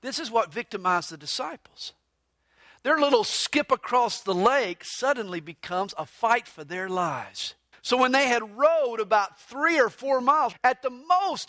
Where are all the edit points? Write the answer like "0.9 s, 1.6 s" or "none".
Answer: 7.7 s, 10.5 s

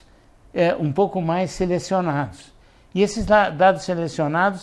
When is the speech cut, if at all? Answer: none

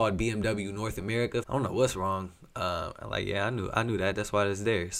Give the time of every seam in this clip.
1.4 s

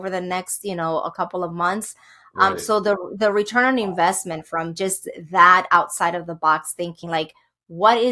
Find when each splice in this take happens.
none

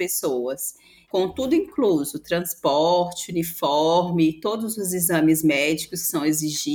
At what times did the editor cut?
1.0 s

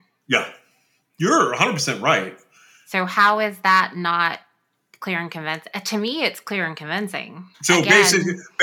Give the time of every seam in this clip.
7.5 s

